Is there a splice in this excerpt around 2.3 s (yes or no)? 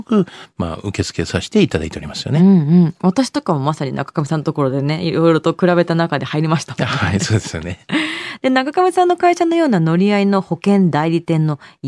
no